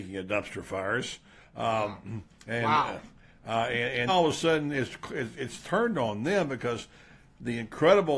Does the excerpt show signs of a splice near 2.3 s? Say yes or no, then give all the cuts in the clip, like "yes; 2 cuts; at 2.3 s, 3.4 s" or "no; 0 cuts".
no; 1 cut; at 4.1 s